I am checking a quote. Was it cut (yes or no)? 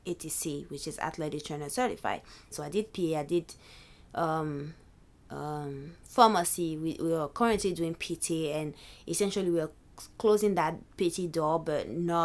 yes